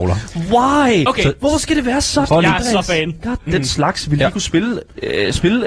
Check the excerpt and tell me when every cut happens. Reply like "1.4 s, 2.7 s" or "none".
2.3 s, 3.5 s